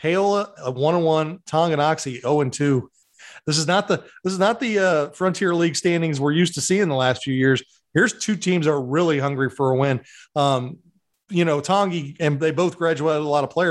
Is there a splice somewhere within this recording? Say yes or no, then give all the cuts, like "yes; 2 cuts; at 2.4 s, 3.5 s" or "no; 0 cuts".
no; 0 cuts